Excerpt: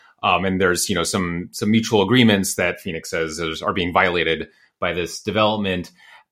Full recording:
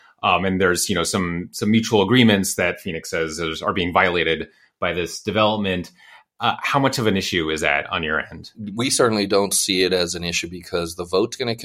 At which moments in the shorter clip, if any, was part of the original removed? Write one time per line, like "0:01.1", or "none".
none